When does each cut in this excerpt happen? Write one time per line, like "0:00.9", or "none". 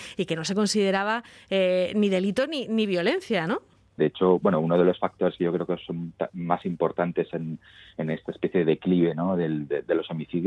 0:04.0